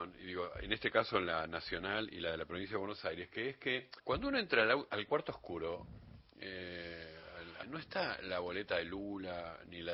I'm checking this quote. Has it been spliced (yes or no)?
yes